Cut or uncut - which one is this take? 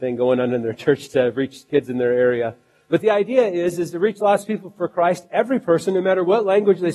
uncut